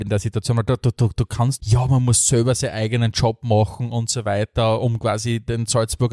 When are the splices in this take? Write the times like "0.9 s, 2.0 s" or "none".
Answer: 1.6 s